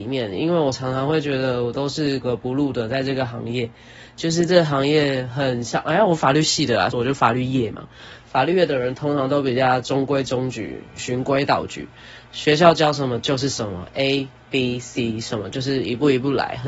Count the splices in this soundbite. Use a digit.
2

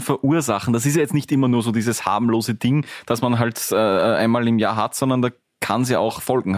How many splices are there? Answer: 0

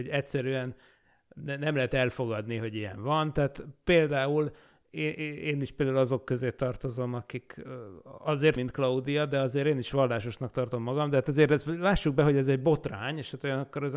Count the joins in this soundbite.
1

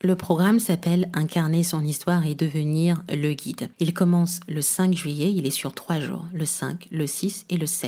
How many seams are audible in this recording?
1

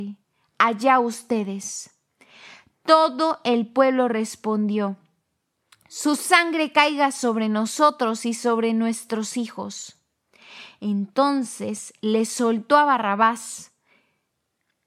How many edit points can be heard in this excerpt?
0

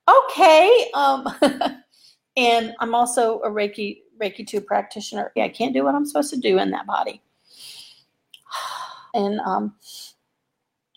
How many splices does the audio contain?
3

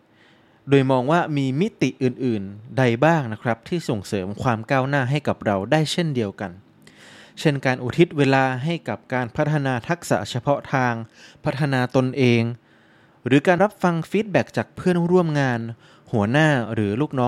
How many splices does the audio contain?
1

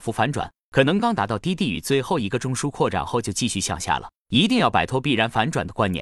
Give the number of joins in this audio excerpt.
2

